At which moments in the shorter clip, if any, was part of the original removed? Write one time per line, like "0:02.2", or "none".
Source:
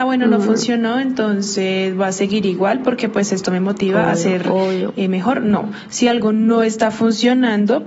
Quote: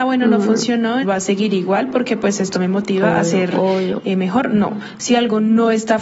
0:01.0